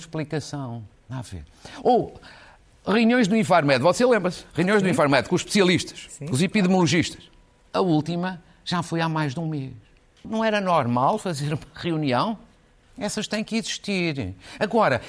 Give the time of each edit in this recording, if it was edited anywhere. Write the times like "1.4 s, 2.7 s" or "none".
7.7 s, 10.2 s, 12.8 s